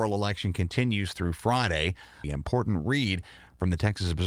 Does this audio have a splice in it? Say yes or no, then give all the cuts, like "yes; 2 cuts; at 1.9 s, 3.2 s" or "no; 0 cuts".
yes; 1 cut; at 2.2 s